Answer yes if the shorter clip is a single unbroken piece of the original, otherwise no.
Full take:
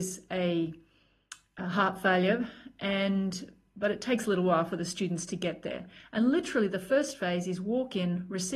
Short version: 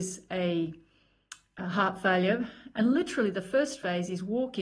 no